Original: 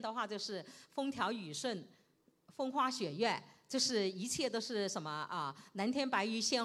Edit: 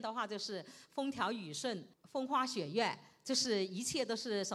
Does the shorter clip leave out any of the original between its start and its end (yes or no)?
yes